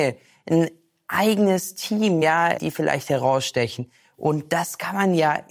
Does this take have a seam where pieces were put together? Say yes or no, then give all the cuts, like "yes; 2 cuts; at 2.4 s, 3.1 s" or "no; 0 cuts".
no; 0 cuts